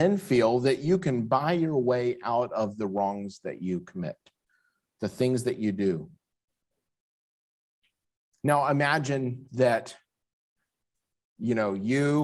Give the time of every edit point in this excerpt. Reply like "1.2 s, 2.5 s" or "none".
none